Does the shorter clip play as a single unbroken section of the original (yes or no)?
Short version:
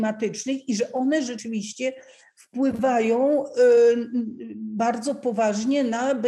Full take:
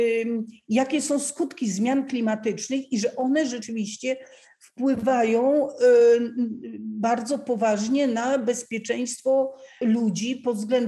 yes